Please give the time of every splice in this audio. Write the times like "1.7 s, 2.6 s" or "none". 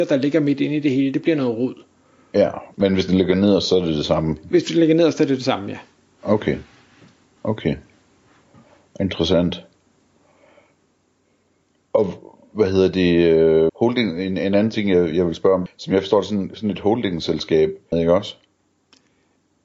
13.7 s, 15.7 s, 17.9 s